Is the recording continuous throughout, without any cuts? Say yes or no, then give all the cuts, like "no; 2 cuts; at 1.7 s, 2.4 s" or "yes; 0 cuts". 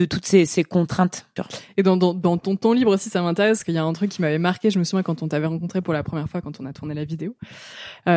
yes; 0 cuts